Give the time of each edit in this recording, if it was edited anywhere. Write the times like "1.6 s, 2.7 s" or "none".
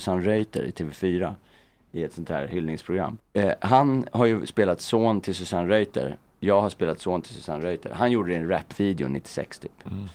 3.2 s